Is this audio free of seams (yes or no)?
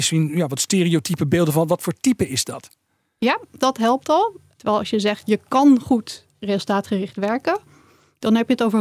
no